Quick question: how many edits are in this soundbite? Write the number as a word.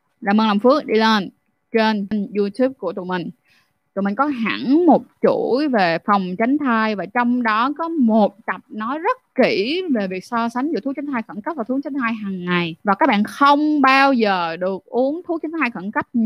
two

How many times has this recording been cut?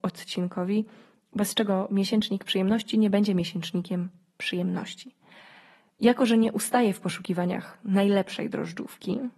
zero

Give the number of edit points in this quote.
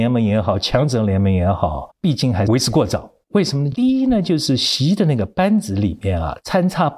zero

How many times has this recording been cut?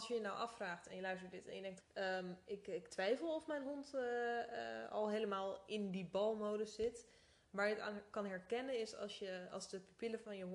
one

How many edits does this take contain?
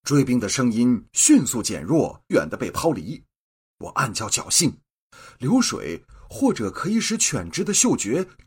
one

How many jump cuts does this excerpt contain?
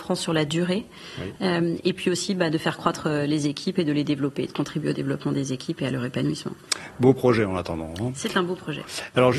one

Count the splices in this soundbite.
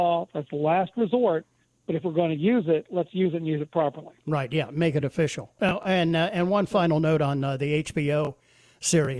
zero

